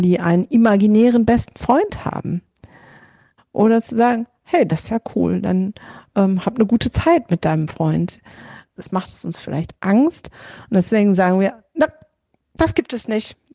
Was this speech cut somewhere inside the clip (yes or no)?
yes